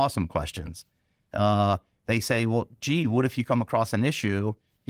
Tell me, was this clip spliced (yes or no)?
no